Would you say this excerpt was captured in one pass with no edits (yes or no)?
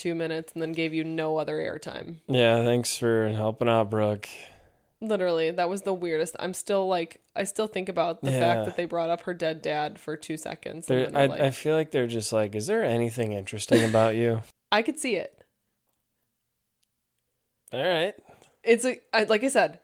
no